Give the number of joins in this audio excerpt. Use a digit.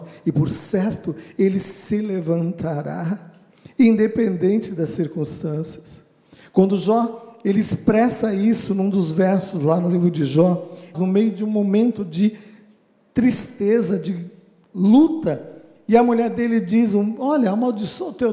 1